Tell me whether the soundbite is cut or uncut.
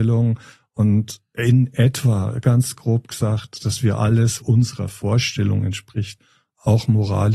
cut